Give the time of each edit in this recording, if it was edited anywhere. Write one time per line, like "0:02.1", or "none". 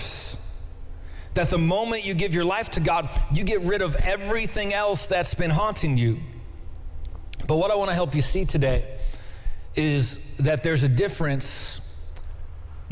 none